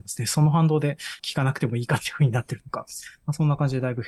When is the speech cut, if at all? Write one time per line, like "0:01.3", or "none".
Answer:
0:01.2